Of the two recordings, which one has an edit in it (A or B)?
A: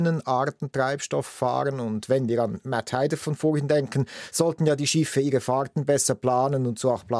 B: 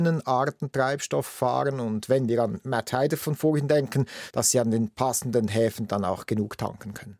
B